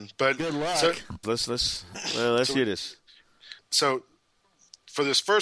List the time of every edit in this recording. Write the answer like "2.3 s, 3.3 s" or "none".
1.2 s, 3.6 s

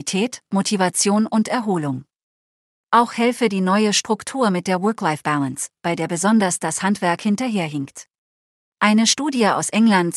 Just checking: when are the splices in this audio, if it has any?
8.7 s

